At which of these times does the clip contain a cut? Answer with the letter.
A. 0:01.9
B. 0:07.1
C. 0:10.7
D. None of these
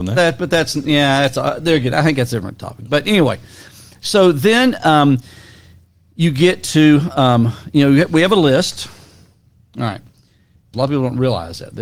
C